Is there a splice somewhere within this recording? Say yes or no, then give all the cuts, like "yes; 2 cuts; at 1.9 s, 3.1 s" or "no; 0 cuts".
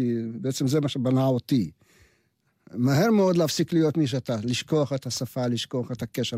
yes; 1 cut; at 2.6 s